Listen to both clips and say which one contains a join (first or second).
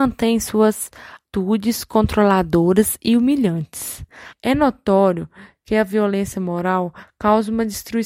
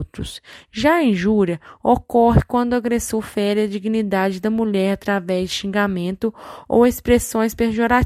first